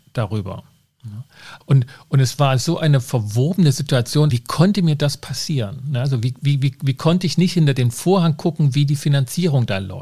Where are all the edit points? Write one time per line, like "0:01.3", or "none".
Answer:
0:01.6
0:04.3